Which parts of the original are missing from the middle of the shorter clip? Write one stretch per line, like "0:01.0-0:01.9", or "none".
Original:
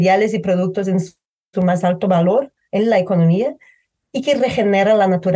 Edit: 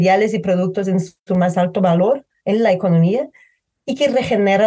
0:01.2-0:01.5